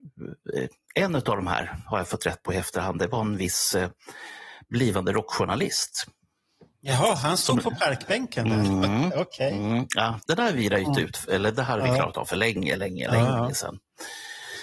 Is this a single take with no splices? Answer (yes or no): no